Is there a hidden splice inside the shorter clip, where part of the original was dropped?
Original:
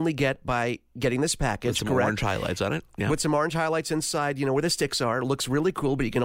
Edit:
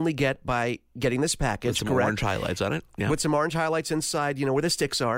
no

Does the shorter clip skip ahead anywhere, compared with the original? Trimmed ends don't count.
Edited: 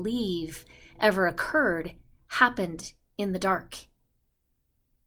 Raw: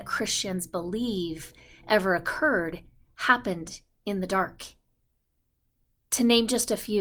no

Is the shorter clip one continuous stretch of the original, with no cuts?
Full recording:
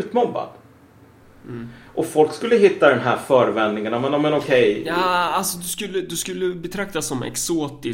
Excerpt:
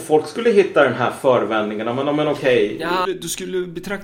no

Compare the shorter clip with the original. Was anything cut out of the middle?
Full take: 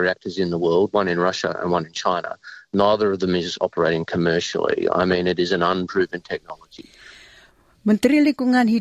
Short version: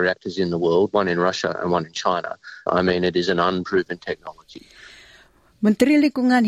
yes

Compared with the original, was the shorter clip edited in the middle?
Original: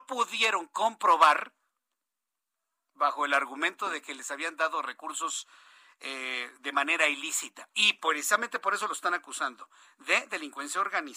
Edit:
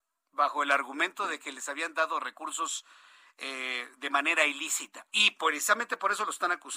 no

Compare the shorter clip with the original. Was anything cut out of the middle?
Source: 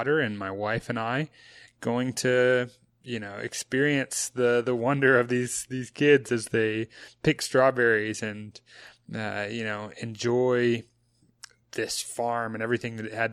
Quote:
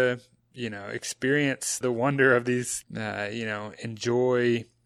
yes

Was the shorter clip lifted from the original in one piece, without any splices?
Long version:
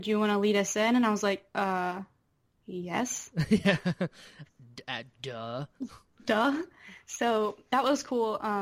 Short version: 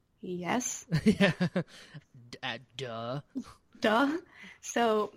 yes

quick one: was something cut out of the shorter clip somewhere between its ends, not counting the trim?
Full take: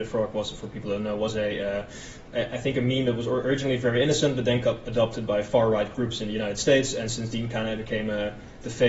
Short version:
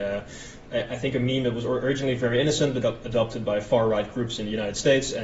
yes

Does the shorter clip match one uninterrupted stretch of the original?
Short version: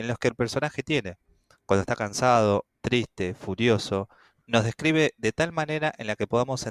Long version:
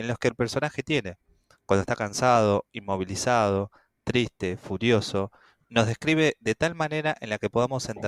no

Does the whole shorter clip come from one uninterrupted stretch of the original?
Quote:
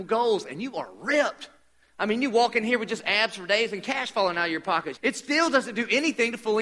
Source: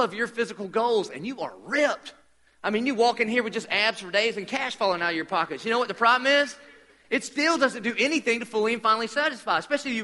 no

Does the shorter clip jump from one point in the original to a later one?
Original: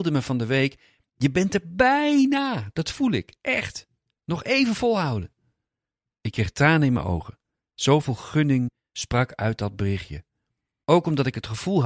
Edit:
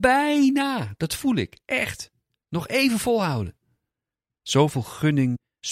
yes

